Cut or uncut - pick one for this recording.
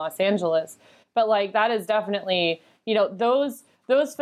uncut